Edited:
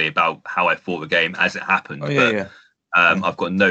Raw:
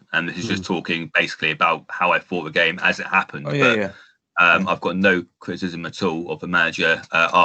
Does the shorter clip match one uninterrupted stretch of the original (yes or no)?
yes